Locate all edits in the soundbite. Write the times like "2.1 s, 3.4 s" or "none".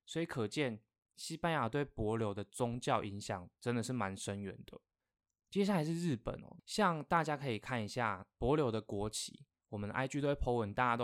none